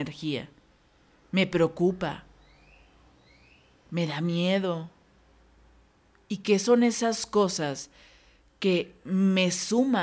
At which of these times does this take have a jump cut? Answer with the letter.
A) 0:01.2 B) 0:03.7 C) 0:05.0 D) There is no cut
D